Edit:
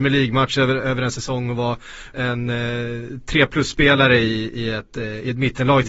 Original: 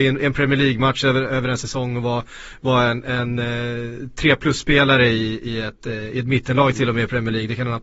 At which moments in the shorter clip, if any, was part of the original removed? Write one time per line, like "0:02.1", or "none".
0:02.1